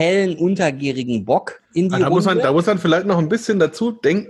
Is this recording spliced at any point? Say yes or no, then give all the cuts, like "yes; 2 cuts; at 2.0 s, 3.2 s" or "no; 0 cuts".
no; 0 cuts